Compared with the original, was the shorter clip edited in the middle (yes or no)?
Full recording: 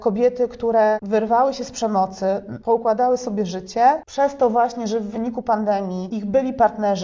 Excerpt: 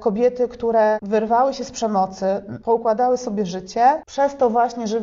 no